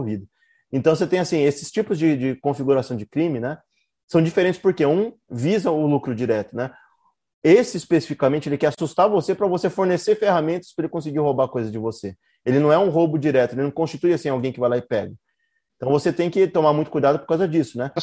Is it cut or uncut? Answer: uncut